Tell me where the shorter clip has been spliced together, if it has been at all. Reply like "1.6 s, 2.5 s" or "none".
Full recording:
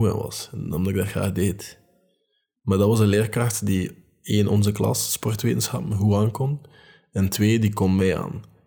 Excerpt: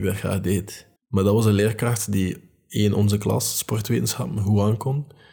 1.0 s

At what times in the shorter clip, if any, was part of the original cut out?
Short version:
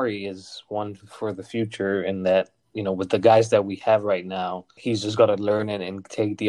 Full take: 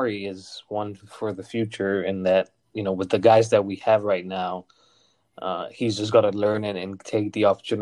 4.8 s

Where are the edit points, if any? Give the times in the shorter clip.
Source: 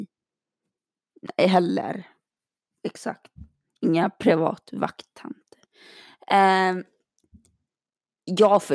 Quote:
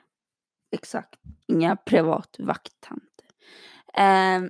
1.4 s

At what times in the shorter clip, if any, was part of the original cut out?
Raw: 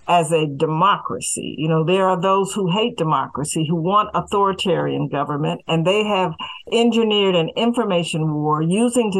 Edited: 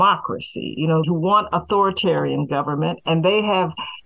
1.0 s

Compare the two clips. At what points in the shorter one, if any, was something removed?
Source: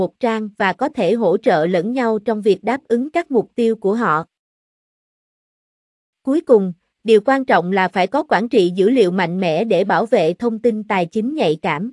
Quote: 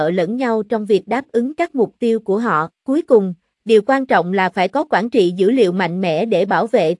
2.7 s

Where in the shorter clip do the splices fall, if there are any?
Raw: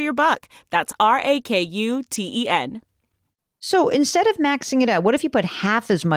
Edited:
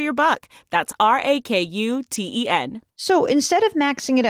2.9 s

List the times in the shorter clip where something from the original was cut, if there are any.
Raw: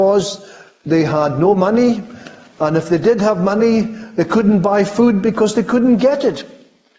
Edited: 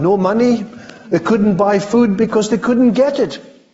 1.1 s

